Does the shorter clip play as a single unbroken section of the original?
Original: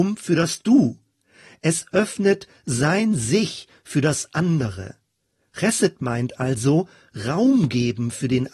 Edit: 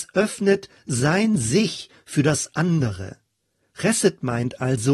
yes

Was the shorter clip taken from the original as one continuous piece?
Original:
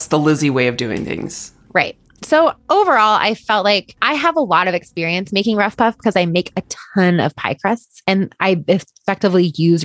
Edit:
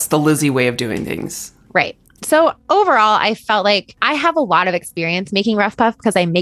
yes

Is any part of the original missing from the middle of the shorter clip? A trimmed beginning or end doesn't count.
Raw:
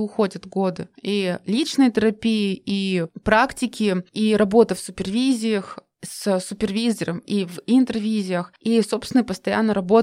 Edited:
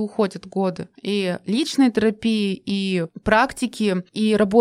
no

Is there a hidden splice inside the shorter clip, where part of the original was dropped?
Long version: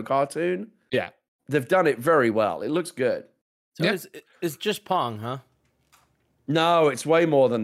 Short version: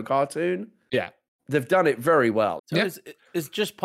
yes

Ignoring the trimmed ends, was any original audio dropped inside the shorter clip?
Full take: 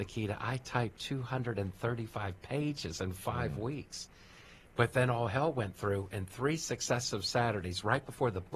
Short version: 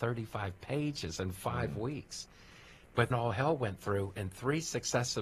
yes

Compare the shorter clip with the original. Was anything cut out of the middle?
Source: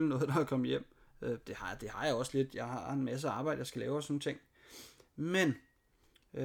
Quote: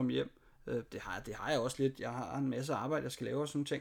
no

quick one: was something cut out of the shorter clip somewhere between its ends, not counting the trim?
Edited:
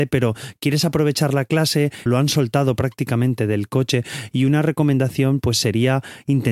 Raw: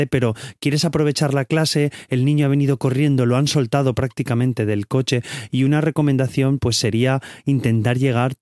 yes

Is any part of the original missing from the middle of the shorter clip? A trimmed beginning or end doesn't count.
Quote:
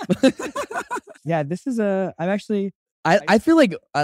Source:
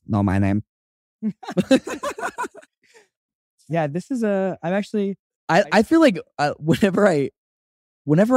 yes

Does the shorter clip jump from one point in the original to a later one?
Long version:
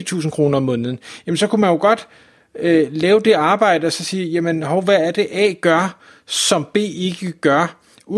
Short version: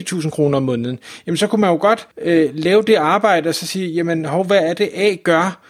yes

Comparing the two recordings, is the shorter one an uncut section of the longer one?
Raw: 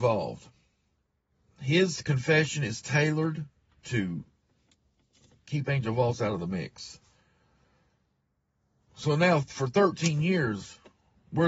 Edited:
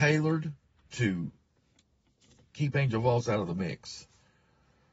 yes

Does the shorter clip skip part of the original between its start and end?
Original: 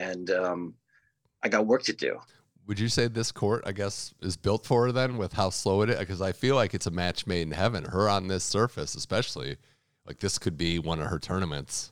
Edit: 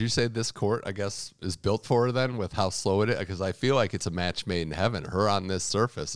no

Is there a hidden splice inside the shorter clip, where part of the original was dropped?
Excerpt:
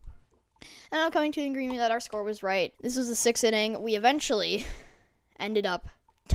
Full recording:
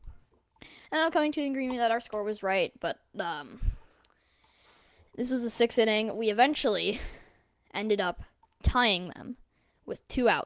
yes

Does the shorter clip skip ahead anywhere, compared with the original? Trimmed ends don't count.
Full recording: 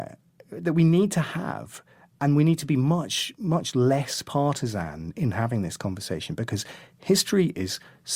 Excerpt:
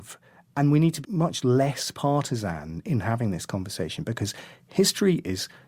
yes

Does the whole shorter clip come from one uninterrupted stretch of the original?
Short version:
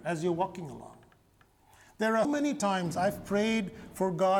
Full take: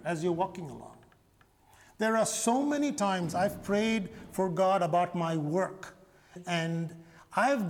no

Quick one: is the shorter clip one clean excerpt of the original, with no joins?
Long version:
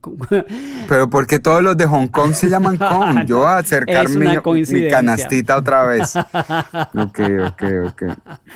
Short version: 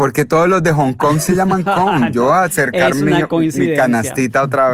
yes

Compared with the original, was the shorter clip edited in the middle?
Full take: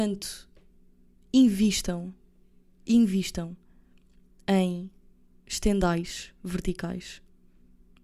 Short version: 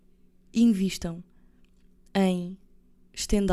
no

